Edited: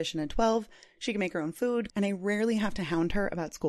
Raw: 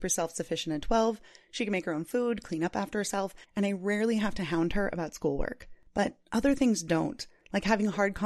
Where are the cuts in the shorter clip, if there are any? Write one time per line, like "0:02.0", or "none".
0:01.9